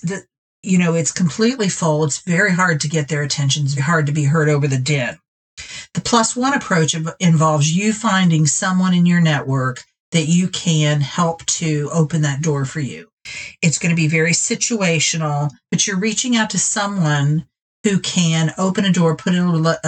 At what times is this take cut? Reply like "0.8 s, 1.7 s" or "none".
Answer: 3.8 s